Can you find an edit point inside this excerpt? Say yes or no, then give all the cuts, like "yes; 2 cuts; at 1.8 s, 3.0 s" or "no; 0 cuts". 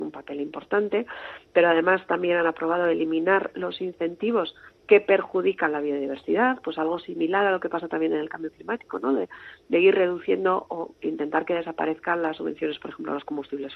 no; 0 cuts